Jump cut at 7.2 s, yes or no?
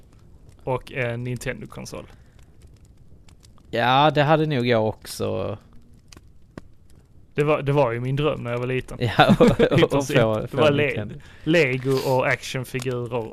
yes